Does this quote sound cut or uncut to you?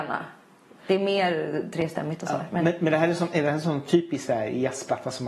uncut